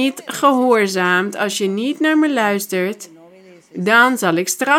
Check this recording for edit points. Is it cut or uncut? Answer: uncut